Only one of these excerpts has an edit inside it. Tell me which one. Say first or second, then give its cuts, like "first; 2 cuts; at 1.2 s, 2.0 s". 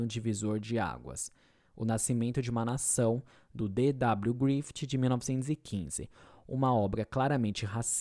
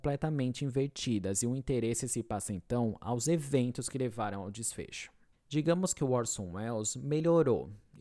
second; 1 cut; at 5.3 s